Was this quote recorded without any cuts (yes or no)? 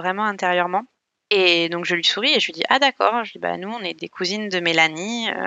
yes